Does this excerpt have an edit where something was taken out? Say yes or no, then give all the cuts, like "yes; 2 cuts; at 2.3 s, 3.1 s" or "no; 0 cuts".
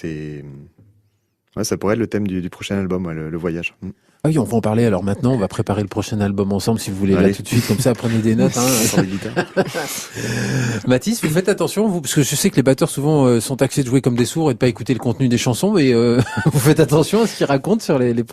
no; 0 cuts